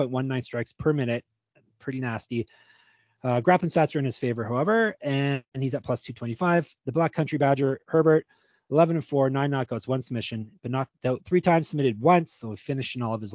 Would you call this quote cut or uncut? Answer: uncut